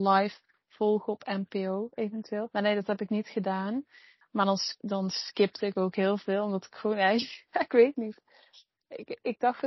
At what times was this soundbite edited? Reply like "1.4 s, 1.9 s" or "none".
2.5 s, 4.2 s